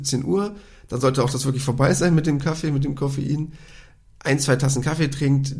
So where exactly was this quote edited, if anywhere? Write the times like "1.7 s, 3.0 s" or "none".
none